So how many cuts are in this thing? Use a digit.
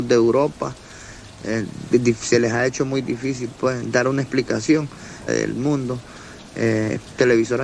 1